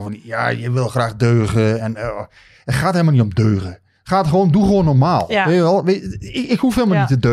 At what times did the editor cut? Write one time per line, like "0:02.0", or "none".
none